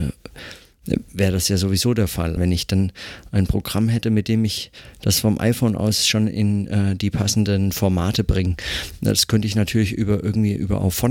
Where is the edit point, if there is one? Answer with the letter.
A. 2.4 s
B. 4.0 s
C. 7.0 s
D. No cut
A